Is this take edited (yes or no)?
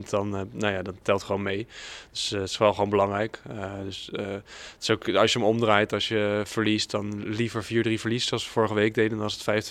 no